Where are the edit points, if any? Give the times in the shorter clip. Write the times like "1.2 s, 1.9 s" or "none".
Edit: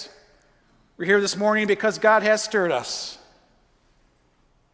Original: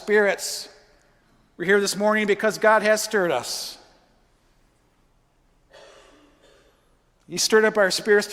none